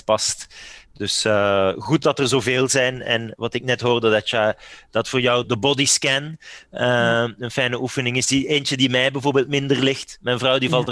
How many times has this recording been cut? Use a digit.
1